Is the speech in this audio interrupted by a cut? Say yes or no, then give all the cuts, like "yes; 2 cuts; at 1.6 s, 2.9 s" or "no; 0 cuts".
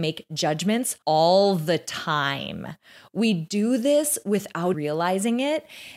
yes; 2 cuts; at 1.0 s, 4.7 s